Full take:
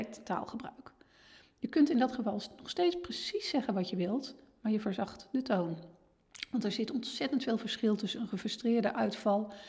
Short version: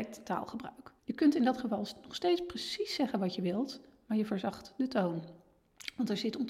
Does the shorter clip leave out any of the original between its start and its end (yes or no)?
yes